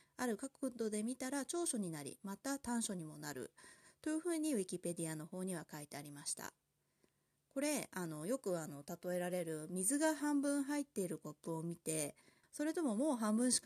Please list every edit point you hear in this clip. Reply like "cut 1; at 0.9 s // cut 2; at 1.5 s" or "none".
cut 1; at 12.4 s